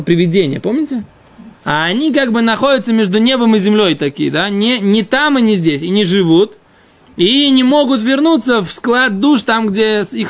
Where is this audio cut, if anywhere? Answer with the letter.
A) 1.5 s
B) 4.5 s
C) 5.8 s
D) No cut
A